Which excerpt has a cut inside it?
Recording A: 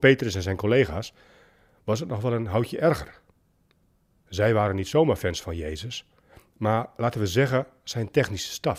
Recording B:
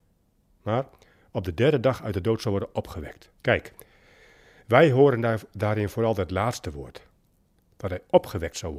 B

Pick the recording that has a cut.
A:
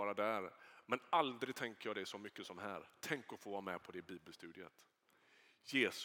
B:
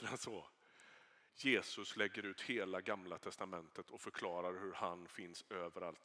B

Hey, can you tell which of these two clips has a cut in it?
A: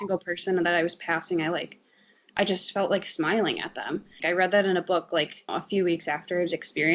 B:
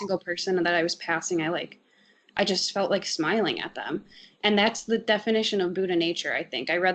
A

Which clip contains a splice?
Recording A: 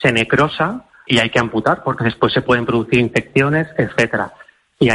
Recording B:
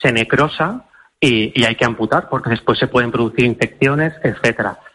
A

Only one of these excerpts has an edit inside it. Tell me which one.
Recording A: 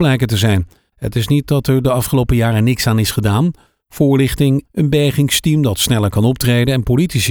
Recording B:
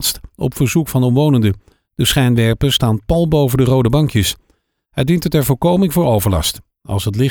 A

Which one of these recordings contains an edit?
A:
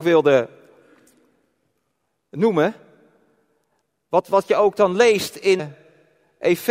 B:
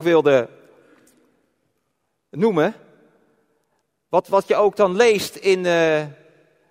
A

